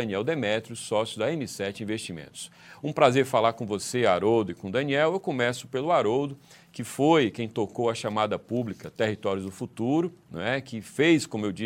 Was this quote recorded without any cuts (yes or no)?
yes